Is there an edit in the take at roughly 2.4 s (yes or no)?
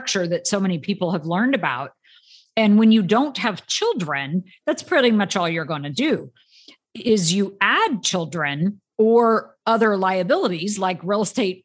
no